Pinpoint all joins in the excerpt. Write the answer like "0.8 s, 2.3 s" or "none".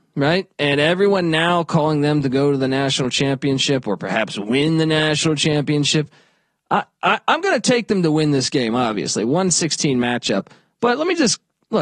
none

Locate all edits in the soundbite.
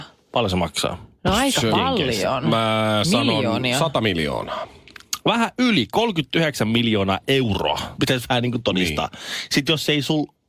8.0 s

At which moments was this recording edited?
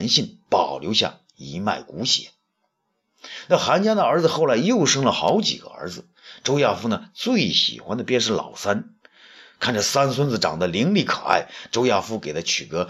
none

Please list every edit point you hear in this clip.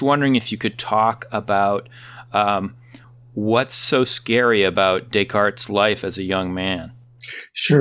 none

